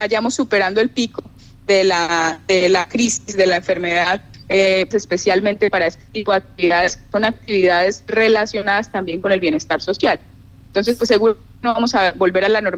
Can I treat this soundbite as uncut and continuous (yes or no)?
no